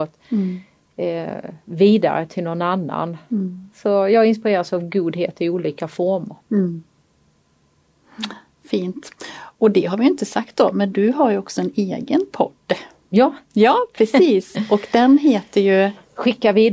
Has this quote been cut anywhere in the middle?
no; 0 cuts

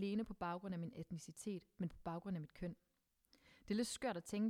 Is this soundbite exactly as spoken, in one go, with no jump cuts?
yes; 0 cuts

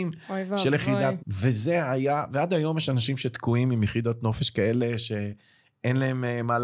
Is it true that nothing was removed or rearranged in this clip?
no; 1 cut; at 1.2 s

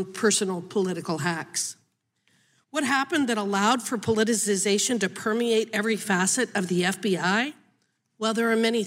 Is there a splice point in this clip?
no; 0 cuts

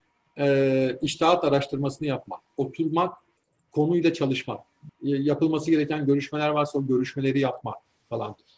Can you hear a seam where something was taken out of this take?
yes; 1 cut; at 4.9 s

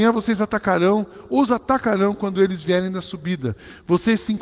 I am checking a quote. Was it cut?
no; 0 cuts

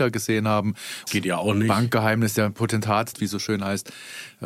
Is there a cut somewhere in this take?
yes; 2 cuts; at 1.1 s, 3.1 s

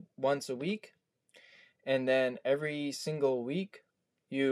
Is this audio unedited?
yes; 0 cuts

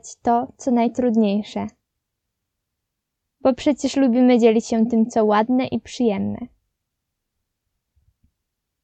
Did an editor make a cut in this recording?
no; 0 cuts

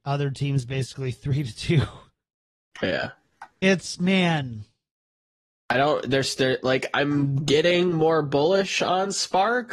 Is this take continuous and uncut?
yes; 0 cuts

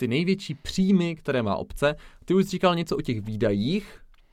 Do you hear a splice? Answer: no; 0 cuts

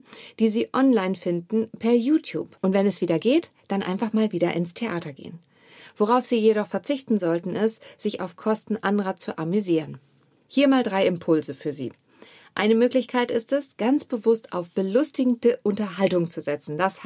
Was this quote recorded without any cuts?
no; 1 cut; at 10.5 s

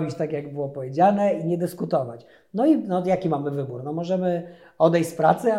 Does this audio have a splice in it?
no; 0 cuts

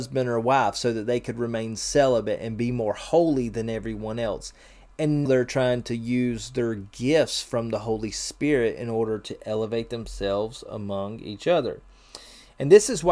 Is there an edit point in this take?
yes; 1 cut; at 5.3 s

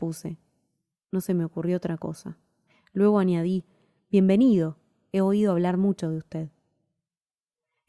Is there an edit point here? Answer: no; 0 cuts

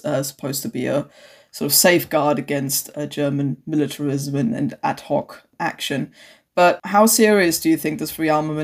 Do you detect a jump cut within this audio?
no; 0 cuts

